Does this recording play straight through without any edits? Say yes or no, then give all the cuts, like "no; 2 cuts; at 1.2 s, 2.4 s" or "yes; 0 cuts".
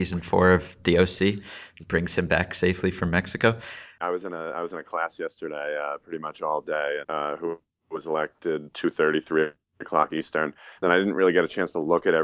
no; 3 cuts; at 4.0 s, 7.0 s, 8.7 s